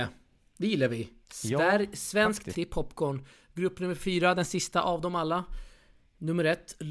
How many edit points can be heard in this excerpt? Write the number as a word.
two